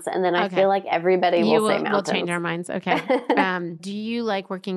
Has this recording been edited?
no; 0 cuts

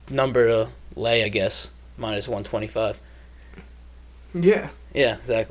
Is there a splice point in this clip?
no; 0 cuts

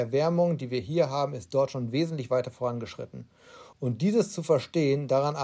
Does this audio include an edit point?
yes; 1 cut; at 3.7 s

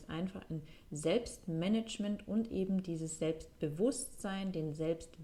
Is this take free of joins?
yes; 0 cuts

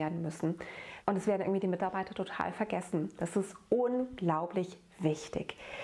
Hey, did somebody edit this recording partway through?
yes; 2 cuts; at 1.0 s, 3.2 s

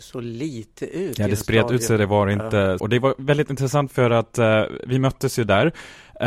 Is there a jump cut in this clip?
yes; 1 cut; at 2.8 s

